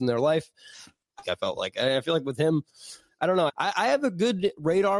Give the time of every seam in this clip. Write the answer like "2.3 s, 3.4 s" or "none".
1.2 s, 3.5 s

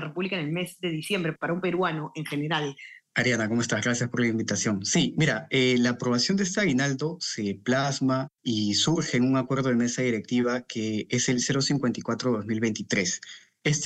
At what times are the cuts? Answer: 3.1 s

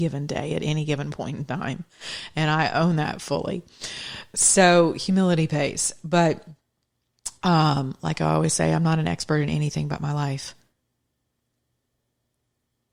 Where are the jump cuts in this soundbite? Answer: none

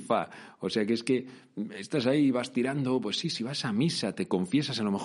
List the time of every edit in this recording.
none

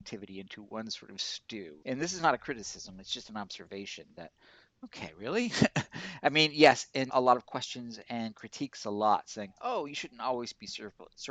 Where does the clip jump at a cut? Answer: 1.8 s, 7.1 s

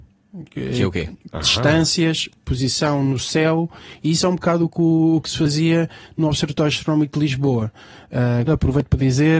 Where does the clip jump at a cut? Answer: 1.3 s, 8.5 s

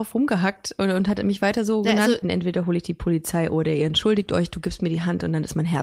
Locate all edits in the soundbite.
2.2 s

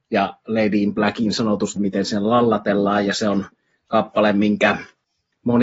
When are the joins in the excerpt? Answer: 1.8 s

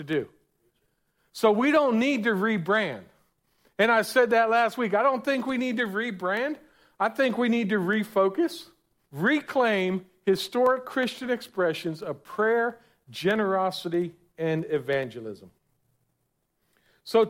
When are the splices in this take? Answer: 9.1 s

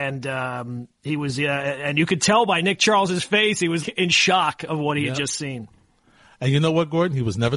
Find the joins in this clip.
3.8 s

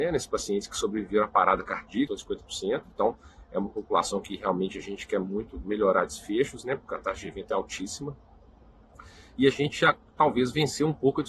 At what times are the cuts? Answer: 2.1 s

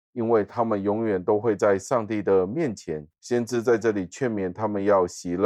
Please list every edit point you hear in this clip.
3.1 s

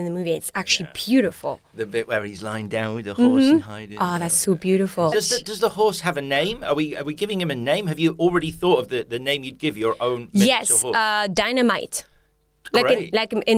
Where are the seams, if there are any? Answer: 5.1 s

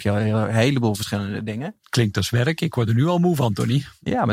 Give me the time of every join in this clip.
none

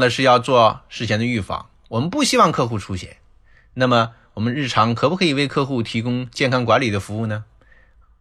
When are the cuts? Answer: none

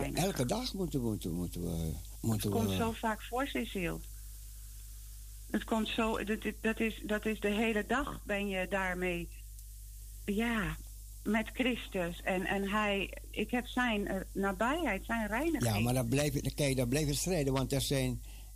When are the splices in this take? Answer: 2.1 s

